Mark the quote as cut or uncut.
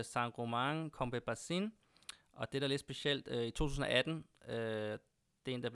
uncut